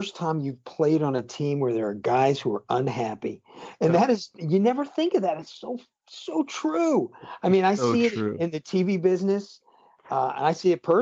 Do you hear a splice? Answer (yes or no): no